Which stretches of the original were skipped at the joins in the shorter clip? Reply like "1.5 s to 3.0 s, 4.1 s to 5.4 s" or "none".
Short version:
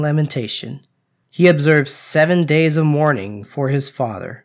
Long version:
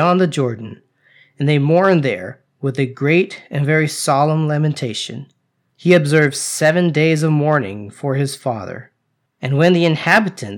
none